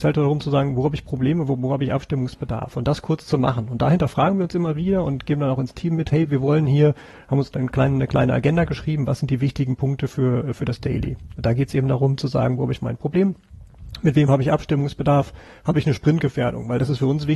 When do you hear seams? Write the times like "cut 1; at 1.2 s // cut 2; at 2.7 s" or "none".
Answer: none

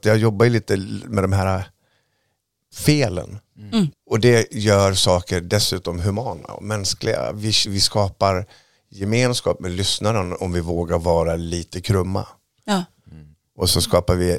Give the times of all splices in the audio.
cut 1; at 3.9 s // cut 2; at 7.7 s

